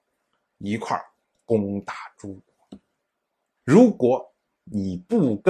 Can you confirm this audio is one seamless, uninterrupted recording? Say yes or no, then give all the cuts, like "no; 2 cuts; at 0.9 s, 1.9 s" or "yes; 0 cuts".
no; 1 cut; at 3.6 s